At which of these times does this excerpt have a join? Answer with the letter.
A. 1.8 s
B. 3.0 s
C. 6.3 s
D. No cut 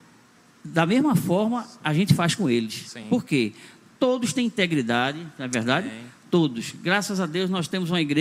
D